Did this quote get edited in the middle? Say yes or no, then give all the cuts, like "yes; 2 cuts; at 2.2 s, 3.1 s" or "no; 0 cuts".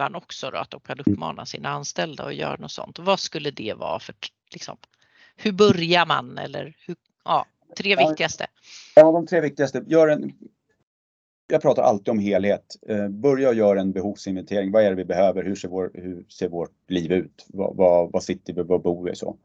no; 0 cuts